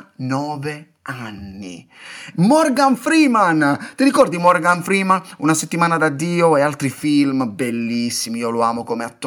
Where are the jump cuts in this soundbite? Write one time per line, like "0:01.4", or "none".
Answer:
0:02.3